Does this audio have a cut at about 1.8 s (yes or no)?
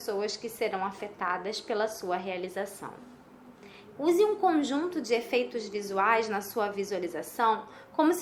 no